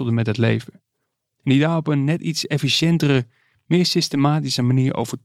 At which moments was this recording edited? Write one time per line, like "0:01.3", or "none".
none